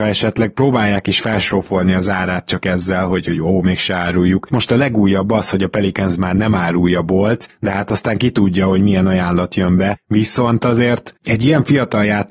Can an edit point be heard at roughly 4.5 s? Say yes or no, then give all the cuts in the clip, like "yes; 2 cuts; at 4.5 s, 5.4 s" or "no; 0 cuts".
yes; 1 cut; at 4.5 s